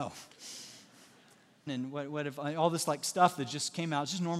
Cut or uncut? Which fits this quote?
cut